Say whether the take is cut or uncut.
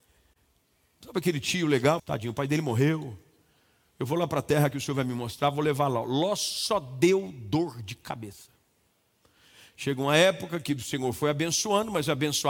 cut